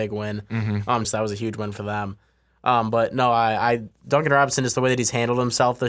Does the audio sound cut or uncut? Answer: cut